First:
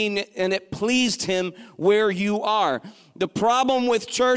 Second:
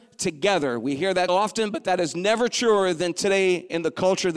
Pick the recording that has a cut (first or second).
second